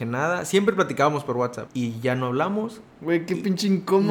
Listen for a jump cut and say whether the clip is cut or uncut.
uncut